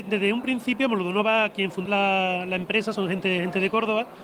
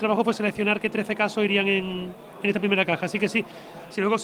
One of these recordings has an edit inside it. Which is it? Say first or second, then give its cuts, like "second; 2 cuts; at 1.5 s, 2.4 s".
first; 2 cuts; at 1.9 s, 2.9 s